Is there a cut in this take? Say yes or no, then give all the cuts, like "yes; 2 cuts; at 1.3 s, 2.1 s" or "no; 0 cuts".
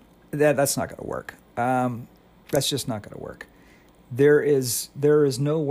no; 0 cuts